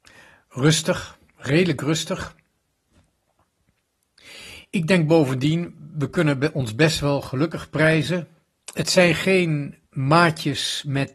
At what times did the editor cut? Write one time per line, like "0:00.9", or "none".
0:08.6
0:09.9